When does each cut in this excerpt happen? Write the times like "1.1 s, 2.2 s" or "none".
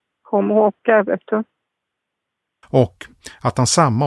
2.6 s